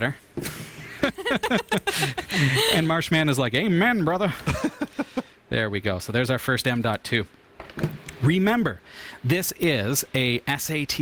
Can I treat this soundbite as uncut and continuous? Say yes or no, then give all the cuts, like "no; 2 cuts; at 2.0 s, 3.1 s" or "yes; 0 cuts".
yes; 0 cuts